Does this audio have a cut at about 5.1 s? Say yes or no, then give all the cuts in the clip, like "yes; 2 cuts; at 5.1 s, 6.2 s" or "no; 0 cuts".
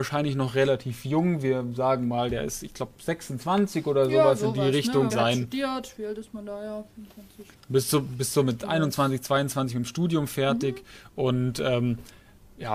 yes; 1 cut; at 5.1 s